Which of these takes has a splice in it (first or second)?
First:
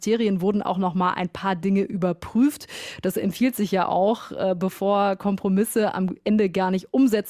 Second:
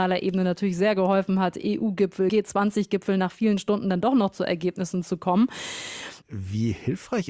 second